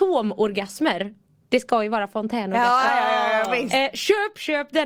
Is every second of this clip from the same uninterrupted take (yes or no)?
yes